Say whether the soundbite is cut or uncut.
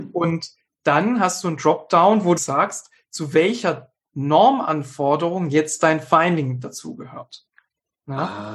cut